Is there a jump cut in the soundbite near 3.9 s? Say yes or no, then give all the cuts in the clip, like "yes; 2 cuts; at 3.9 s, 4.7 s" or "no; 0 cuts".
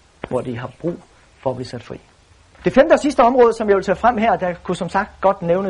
no; 1 cut; at 2.6 s